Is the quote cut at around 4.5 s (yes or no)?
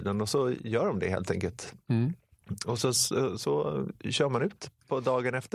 no